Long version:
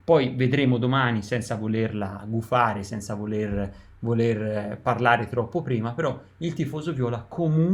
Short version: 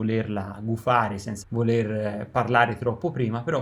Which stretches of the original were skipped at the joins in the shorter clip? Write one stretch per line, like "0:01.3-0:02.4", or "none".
0:03.1-0:03.9